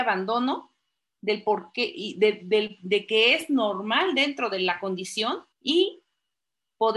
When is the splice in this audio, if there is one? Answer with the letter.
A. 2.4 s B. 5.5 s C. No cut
B